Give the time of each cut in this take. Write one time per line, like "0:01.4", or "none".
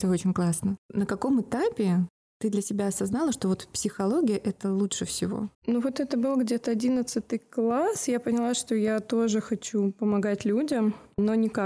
0:05.5